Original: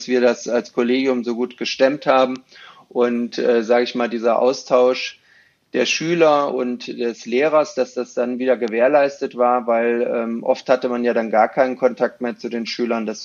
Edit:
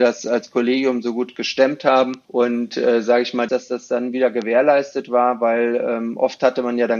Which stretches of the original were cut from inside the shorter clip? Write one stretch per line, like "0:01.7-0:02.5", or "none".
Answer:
0:02.5-0:02.9
0:04.1-0:07.7